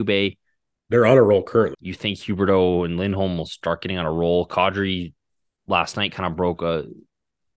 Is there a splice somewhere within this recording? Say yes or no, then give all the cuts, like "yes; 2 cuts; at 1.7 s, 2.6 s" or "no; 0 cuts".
yes; 1 cut; at 1.7 s